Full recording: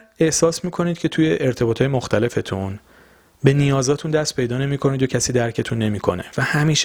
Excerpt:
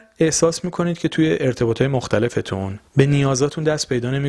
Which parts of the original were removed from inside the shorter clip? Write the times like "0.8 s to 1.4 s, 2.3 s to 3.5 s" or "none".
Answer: 2.9 s to 3.3 s